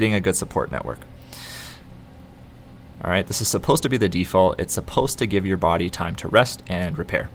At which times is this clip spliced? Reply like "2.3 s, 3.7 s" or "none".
2.9 s